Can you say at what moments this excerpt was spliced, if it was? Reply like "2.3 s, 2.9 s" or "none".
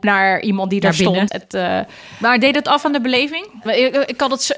1.3 s, 3.6 s